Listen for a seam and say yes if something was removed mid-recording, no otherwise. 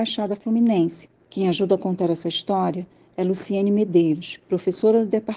no